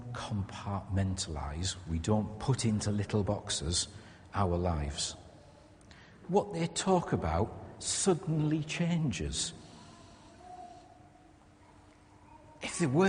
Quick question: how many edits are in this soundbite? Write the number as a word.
one